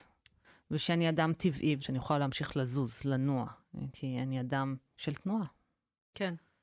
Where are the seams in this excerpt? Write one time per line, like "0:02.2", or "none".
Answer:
0:01.8
0:04.9